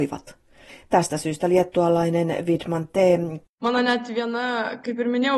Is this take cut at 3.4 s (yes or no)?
yes